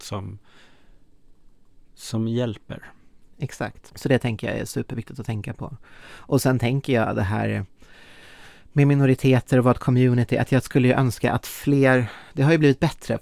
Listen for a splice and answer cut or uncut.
cut